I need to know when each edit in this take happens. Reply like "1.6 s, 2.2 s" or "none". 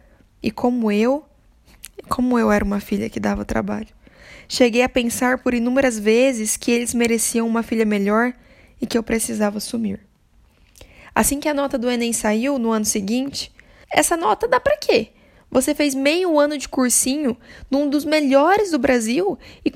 13.8 s